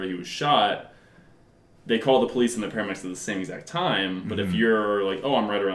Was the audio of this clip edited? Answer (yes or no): no